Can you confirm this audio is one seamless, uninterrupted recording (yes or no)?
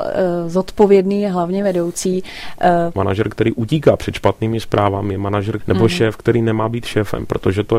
no